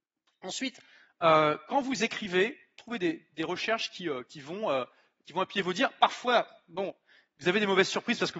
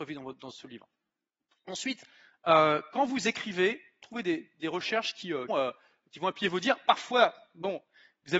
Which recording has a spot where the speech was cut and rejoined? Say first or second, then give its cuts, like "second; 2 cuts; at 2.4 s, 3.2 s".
second; 1 cut; at 5.5 s